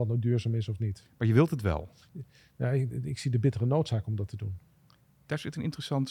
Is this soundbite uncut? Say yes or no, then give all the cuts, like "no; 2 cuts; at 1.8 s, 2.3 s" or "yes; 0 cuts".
yes; 0 cuts